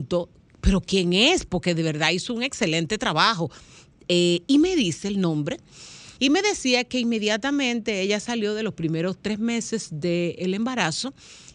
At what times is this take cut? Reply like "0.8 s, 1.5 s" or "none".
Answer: 6.2 s